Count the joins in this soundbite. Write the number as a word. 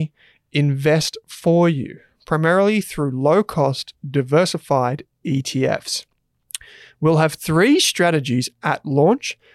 zero